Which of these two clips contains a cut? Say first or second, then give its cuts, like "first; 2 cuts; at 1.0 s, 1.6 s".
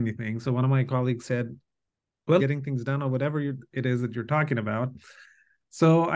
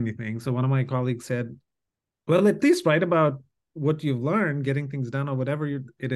first; 1 cut; at 2.4 s